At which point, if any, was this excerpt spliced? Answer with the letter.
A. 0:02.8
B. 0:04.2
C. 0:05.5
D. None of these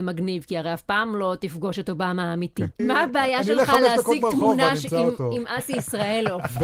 A